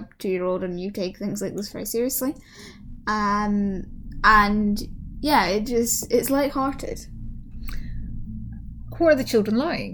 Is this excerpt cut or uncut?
uncut